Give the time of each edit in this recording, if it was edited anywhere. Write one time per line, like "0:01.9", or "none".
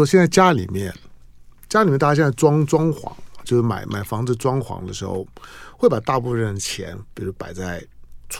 none